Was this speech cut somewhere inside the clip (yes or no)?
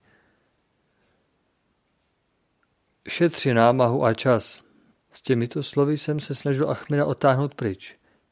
yes